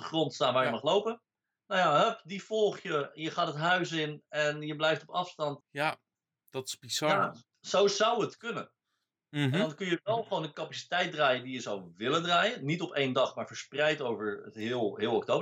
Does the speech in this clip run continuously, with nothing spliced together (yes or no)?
no